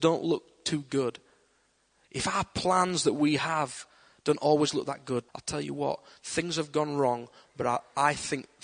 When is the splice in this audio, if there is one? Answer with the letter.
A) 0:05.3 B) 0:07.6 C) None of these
A